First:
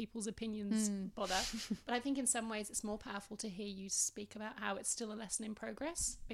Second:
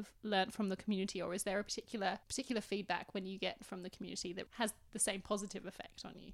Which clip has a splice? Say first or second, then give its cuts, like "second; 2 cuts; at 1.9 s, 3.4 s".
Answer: second; 2 cuts; at 2.2 s, 4.5 s